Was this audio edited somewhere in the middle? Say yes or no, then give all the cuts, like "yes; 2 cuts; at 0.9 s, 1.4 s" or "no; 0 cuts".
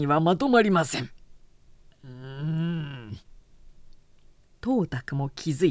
no; 0 cuts